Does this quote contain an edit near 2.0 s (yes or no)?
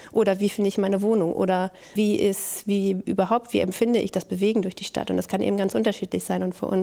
yes